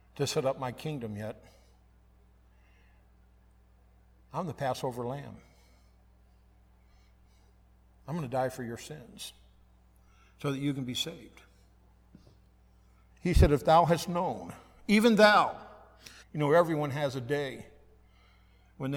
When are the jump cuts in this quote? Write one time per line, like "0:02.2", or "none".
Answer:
0:13.1
0:16.2